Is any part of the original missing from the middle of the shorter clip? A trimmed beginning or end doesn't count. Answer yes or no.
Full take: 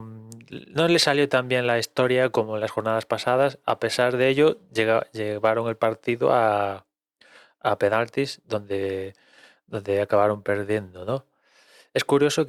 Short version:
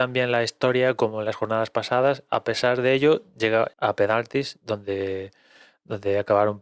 yes